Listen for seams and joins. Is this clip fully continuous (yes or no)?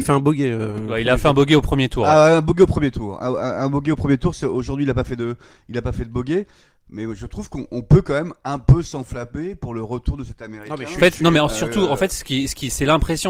yes